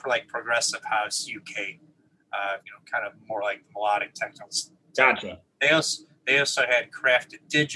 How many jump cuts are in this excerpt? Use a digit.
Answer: 1